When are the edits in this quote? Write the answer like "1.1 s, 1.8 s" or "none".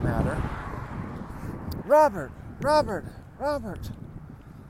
1.8 s